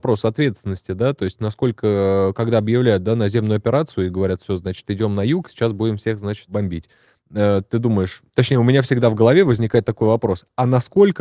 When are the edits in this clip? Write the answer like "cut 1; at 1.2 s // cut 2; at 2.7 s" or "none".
none